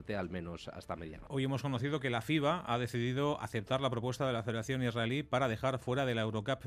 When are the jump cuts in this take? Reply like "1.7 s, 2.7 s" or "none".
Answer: 1.3 s